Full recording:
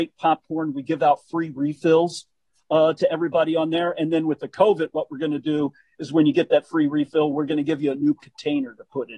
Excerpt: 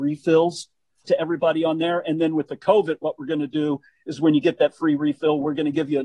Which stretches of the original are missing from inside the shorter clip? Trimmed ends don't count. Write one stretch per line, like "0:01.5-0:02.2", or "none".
0:02.6-0:03.0

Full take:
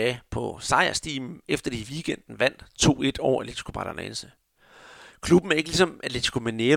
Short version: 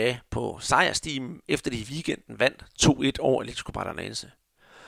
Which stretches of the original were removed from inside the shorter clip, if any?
none

